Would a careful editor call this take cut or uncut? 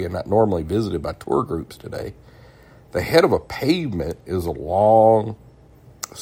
uncut